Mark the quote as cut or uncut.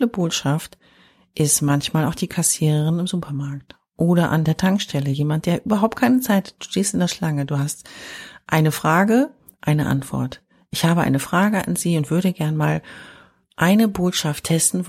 cut